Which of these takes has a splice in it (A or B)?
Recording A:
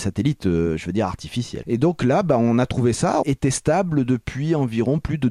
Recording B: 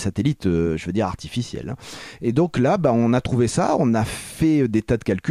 A